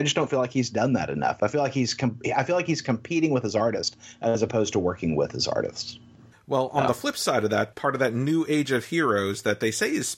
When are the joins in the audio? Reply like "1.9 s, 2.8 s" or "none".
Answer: 6.3 s, 7.7 s